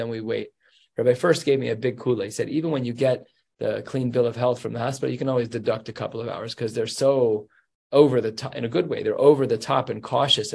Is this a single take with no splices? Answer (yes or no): yes